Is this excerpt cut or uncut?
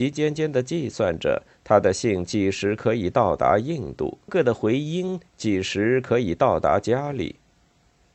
cut